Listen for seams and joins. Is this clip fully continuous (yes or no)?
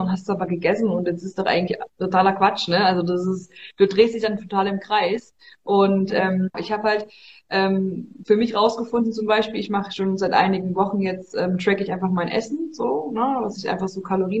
no